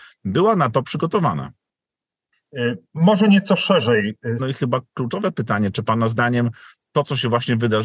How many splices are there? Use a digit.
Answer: 1